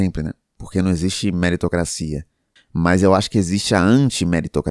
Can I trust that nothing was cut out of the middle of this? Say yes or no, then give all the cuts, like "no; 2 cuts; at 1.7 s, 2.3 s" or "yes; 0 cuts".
no; 1 cut; at 2.6 s